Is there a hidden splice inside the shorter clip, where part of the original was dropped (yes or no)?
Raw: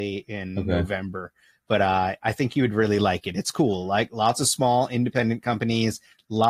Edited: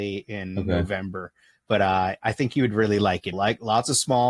yes